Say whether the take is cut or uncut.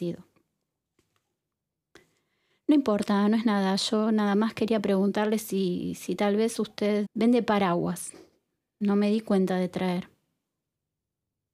cut